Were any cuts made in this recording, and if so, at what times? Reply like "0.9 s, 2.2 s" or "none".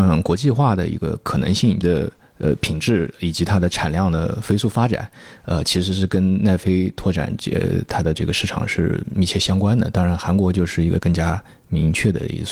1.8 s